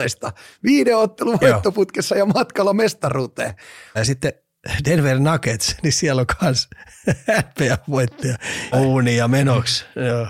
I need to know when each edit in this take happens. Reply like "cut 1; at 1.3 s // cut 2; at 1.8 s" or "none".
cut 1; at 4.0 s // cut 2; at 8.7 s

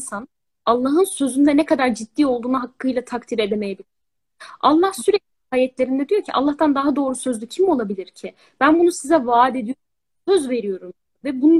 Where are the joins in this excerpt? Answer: none

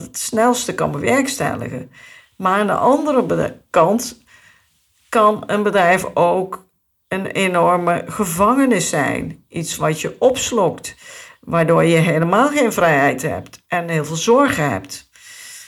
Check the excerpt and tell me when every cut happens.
none

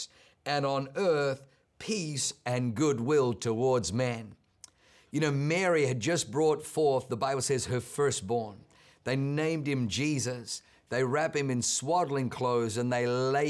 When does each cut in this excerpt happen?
none

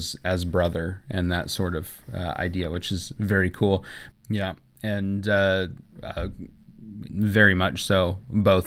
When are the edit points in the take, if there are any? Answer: cut 1; at 4.1 s // cut 2; at 5.8 s // cut 3; at 7.1 s

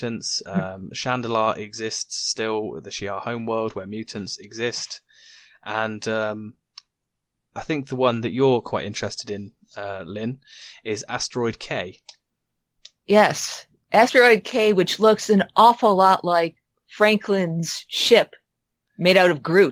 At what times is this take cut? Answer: none

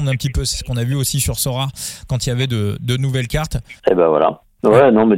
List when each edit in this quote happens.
cut 1; at 3.8 s

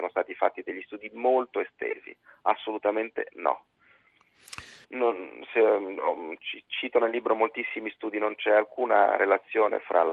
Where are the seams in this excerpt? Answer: cut 1; at 4.8 s

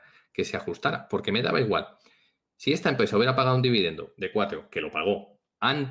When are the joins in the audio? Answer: none

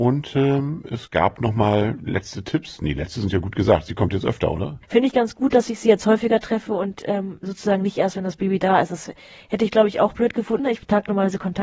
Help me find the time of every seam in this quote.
cut 1; at 10.6 s

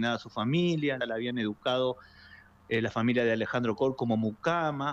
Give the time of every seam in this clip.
cut 1; at 1.0 s

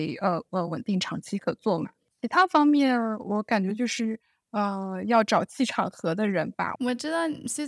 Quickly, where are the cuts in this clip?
cut 1; at 6.8 s

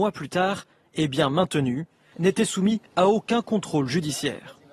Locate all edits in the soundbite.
cut 1; at 2.1 s

